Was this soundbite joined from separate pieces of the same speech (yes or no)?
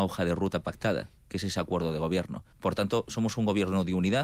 yes